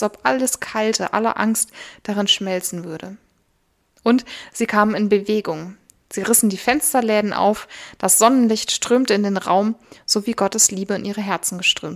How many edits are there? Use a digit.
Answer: 1